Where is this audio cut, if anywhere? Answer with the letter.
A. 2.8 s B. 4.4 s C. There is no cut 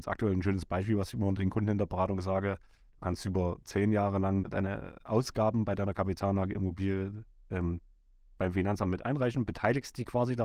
B